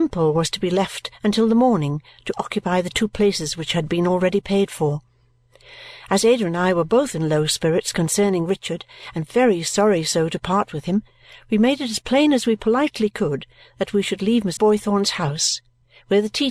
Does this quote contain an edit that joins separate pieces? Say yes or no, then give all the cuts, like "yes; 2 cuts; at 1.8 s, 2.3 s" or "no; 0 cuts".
yes; 1 cut; at 14.6 s